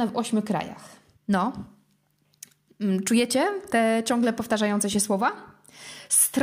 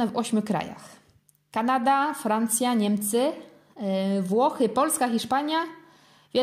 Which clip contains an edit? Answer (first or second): first